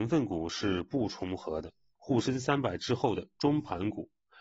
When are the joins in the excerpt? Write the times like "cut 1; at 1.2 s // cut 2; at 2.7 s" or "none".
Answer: cut 1; at 2.0 s